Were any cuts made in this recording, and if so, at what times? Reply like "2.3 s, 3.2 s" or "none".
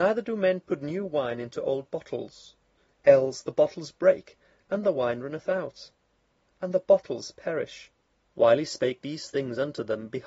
8.3 s